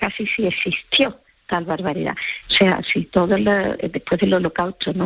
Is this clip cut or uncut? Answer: cut